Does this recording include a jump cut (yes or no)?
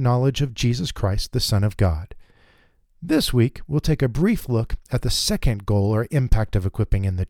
no